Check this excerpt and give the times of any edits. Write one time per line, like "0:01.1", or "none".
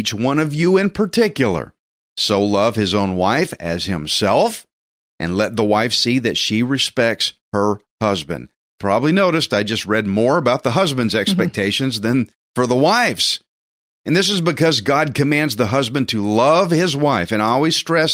none